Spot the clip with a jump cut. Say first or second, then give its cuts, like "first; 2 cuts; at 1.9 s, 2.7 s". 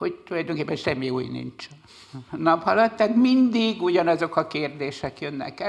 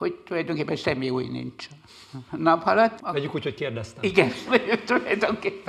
second; 2 cuts; at 3.0 s, 4.4 s